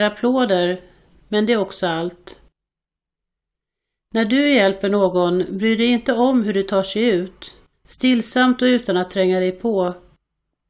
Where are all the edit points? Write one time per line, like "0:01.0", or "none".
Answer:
0:07.7